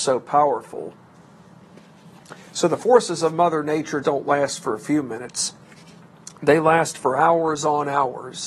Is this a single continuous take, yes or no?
no